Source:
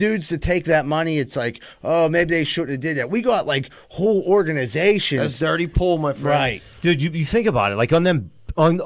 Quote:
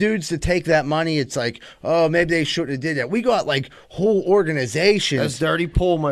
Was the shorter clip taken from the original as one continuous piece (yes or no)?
yes